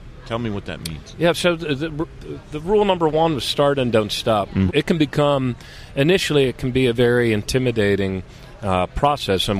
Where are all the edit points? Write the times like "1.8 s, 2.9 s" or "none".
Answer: 4.7 s